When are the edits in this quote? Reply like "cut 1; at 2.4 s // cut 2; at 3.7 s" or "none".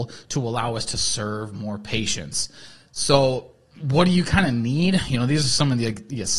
none

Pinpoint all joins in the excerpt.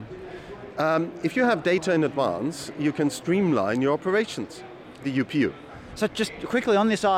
cut 1; at 5.0 s

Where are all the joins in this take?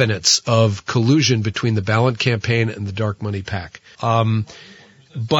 cut 1; at 3.9 s

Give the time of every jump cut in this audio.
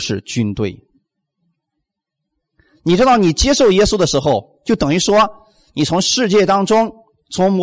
none

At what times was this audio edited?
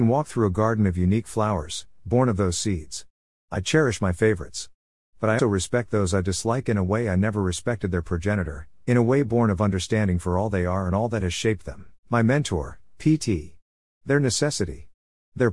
cut 1; at 5.4 s // cut 2; at 12.0 s // cut 3; at 13.9 s

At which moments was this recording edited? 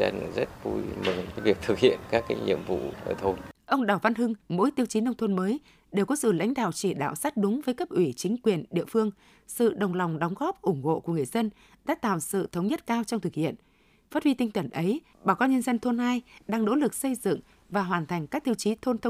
cut 1; at 4.4 s

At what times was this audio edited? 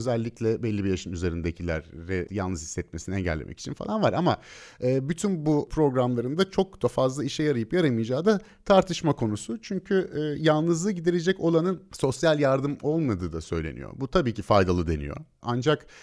none

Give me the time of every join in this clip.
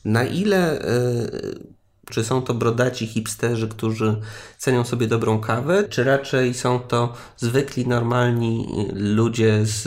cut 1; at 2.1 s // cut 2; at 5.9 s

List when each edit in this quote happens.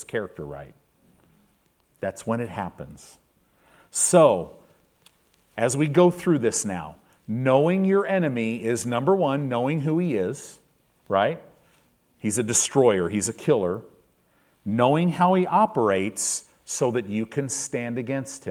cut 1; at 1.9 s

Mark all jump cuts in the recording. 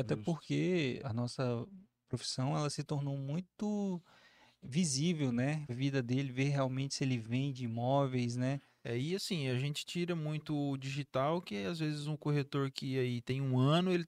cut 1; at 1.0 s // cut 2; at 5.7 s

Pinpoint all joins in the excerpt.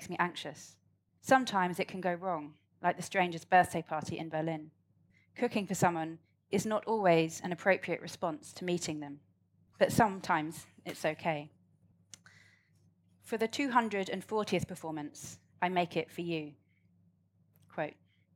cut 1; at 1.2 s // cut 2; at 15.5 s

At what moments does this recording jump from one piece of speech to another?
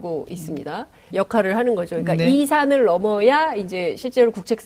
cut 1; at 1.1 s

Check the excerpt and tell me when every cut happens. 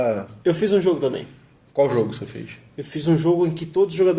none

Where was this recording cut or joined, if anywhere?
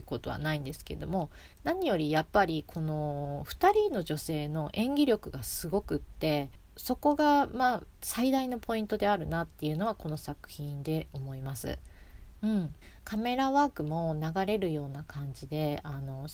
cut 1; at 12.4 s

